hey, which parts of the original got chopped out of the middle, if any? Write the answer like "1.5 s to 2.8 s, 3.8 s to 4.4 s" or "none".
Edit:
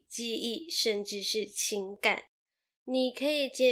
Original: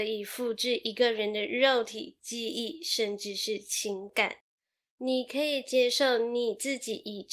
none

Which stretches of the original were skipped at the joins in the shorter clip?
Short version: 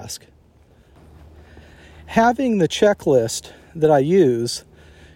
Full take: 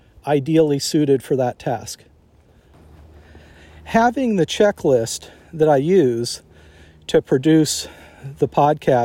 none

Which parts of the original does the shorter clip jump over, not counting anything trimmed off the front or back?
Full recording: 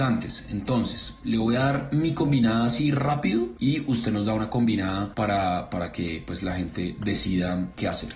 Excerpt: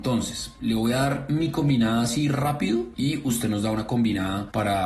none

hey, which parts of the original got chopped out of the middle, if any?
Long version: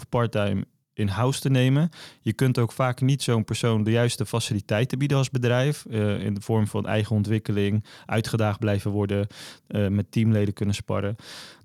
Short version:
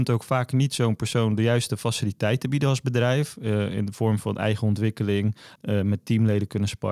8.0 s to 9.6 s

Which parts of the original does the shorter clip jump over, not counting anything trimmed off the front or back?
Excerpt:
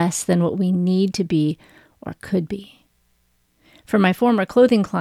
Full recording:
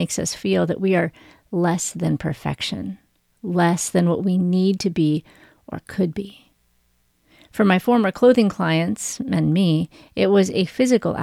none

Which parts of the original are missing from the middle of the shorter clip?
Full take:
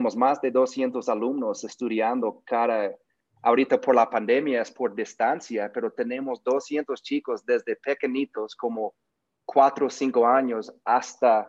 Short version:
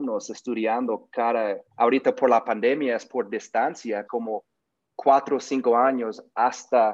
3.0 s to 3.3 s, 5.7 s to 8.6 s

